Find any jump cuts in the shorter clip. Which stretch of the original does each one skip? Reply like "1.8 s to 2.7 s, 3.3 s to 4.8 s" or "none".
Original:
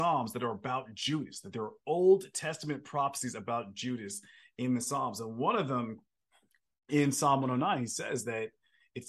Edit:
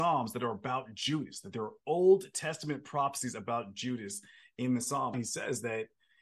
5.1 s to 7.8 s